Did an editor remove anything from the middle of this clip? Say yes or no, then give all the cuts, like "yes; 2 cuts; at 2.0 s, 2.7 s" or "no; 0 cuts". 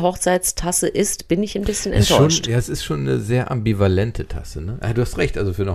no; 0 cuts